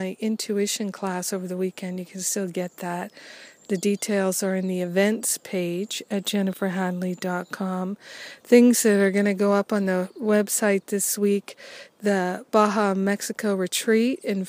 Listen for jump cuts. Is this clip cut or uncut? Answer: uncut